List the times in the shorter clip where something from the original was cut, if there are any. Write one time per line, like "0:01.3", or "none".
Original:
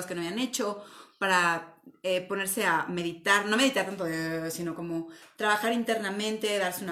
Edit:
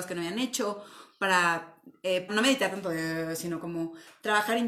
0:02.3